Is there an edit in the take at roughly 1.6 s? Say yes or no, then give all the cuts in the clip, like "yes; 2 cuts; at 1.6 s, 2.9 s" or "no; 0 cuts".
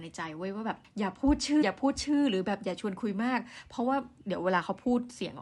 yes; 1 cut; at 1.6 s